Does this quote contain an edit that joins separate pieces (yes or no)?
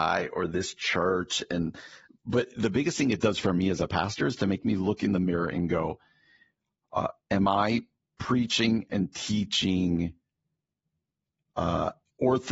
no